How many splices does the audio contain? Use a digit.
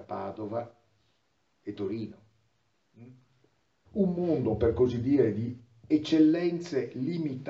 1